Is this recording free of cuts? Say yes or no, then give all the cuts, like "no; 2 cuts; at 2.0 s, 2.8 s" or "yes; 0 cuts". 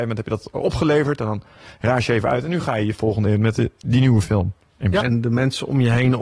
no; 1 cut; at 5.0 s